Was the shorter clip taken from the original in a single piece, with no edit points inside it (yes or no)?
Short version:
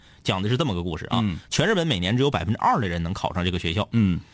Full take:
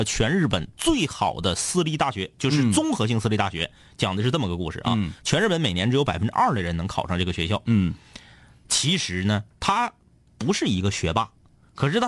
yes